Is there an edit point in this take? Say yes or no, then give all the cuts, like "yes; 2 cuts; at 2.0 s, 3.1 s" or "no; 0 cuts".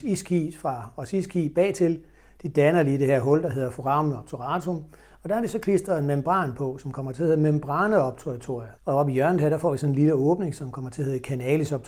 yes; 1 cut; at 8.8 s